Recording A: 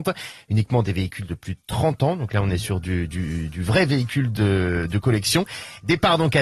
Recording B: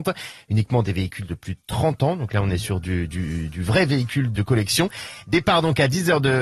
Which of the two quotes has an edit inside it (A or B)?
B